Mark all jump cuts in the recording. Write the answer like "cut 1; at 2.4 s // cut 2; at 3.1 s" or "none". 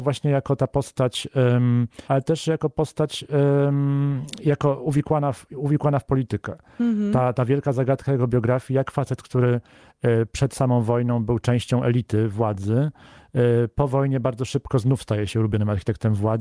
cut 1; at 2.1 s